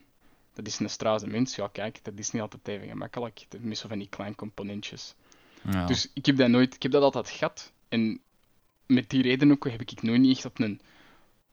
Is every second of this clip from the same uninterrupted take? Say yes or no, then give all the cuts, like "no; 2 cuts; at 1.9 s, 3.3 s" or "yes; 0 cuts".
yes; 0 cuts